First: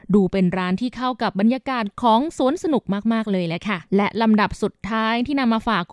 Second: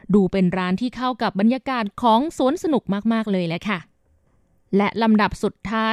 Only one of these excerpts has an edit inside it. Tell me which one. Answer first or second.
first